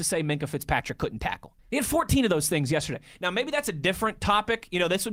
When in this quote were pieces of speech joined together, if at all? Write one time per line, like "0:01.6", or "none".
0:01.6